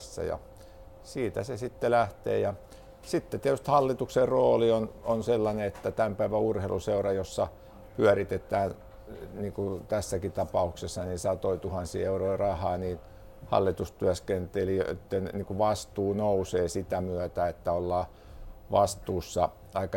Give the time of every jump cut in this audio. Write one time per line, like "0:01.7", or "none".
none